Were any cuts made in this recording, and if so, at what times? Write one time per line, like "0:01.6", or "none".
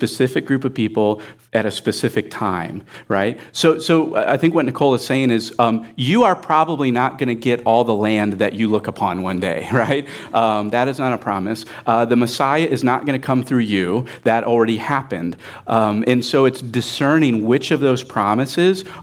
none